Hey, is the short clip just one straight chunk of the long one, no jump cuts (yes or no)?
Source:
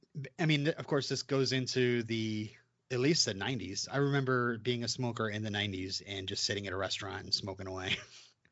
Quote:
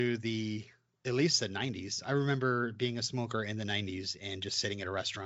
yes